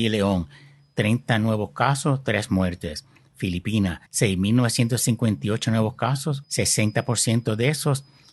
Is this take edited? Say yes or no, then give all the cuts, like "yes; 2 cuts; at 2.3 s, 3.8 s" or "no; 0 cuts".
yes; 2 cuts; at 4.1 s, 6.4 s